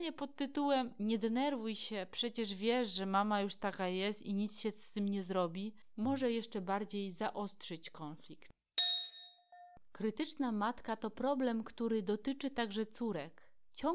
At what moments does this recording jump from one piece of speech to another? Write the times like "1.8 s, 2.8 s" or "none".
none